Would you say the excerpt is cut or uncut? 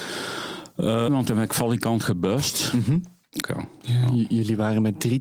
cut